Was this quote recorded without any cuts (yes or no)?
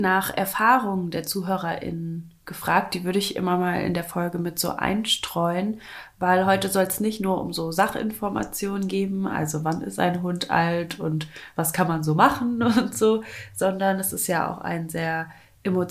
yes